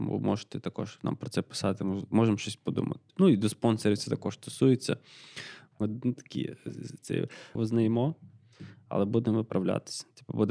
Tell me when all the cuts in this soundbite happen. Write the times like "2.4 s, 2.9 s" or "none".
5.7 s, 7.6 s